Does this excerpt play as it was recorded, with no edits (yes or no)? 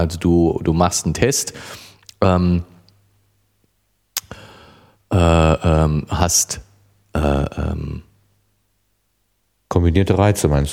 yes